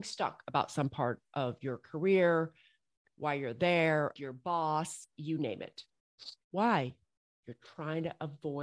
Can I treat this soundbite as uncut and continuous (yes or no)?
no